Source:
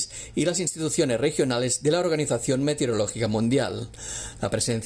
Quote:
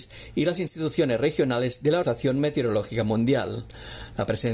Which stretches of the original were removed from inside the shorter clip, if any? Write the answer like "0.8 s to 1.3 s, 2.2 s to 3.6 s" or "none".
2.0 s to 2.3 s